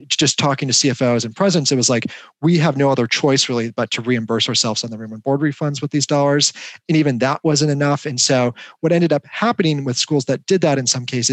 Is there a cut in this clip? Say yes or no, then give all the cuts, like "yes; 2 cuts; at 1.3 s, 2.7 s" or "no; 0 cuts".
no; 0 cuts